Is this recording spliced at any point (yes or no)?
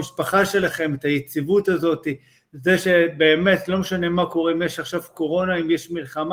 no